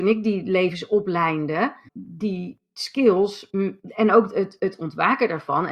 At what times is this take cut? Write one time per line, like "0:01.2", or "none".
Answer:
0:01.9